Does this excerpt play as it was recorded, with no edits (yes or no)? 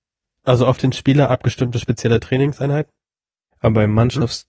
no